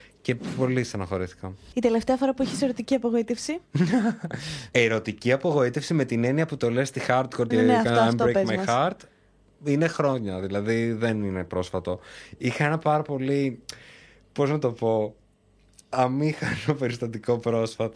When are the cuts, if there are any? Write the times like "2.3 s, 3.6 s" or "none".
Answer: 7.5 s